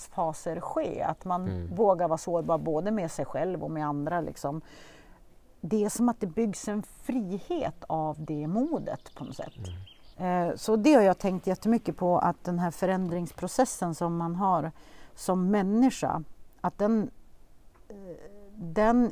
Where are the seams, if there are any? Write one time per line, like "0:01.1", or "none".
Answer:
0:10.1